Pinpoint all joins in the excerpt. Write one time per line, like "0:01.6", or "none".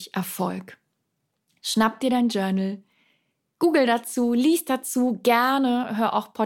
none

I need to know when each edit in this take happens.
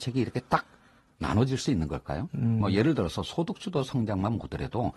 none

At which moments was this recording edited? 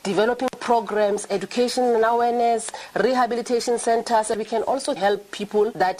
none

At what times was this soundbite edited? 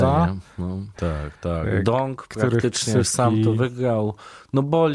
0:00.9

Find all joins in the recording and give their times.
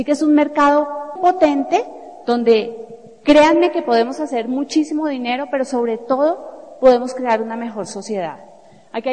0:01.2

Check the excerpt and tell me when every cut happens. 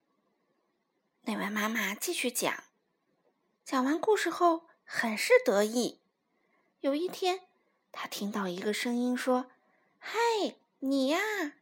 0:06.7

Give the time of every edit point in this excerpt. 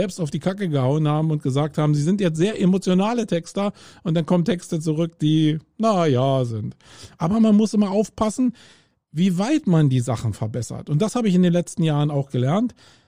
0:05.7
0:07.1

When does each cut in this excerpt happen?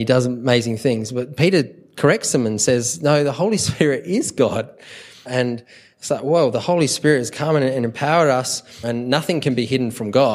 0:05.3
0:08.8

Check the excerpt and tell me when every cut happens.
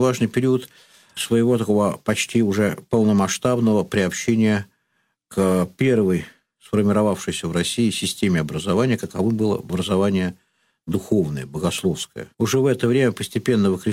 0:12.3

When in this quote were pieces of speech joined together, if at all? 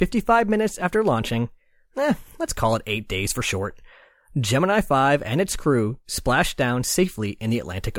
none

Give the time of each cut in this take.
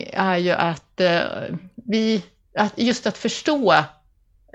none

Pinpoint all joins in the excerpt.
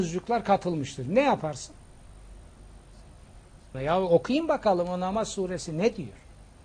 0:03.7

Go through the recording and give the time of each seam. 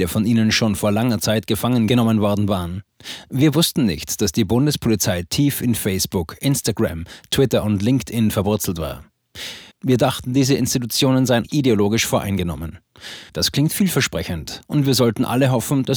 0:09.7
0:11.4
0:13.3

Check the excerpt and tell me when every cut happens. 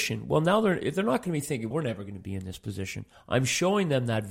0:01.7

